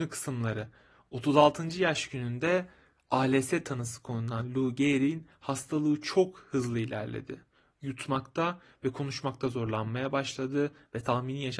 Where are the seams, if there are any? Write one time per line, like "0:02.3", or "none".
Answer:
none